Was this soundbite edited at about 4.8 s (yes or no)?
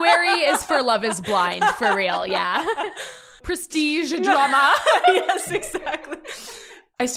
no